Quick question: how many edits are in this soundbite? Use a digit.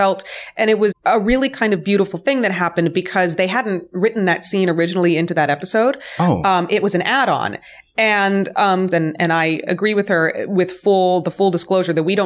2